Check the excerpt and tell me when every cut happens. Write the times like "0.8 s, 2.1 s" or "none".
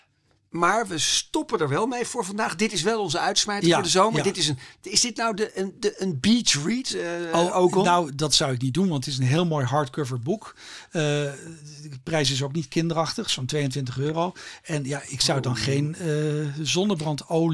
none